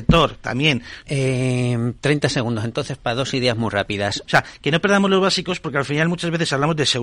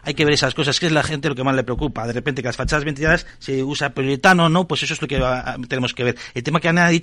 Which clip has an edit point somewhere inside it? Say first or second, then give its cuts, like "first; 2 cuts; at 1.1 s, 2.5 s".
first; 2 cuts; at 1.0 s, 4.3 s